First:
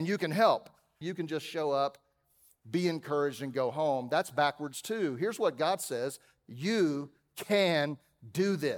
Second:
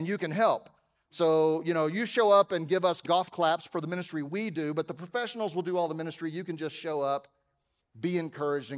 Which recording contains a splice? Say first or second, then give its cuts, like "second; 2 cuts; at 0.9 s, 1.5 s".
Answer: first; 1 cut; at 1.0 s